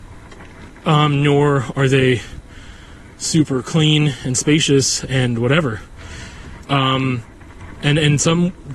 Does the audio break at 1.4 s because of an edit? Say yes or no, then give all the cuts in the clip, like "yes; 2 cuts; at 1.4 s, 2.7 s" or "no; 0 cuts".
no; 1 cut; at 6.6 s